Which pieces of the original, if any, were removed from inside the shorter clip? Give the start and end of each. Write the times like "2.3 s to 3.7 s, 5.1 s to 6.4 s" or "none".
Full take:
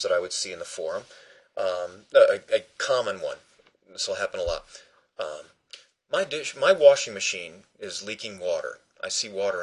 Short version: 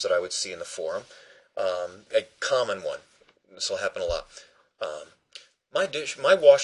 2.1 s to 2.4 s